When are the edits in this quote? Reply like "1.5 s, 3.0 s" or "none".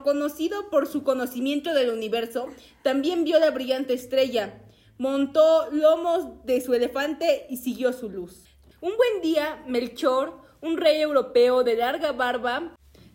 8.7 s